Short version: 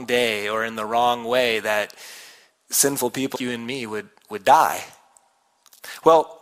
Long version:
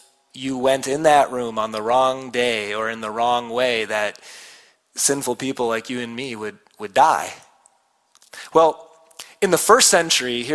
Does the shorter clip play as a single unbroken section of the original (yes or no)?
no